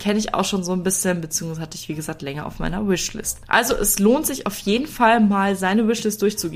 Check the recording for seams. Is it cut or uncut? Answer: uncut